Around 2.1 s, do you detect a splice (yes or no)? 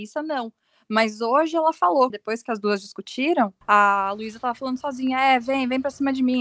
yes